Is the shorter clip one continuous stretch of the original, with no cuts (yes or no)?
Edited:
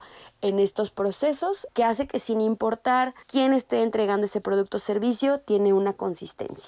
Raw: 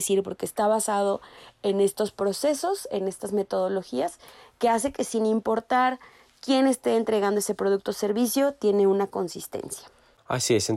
no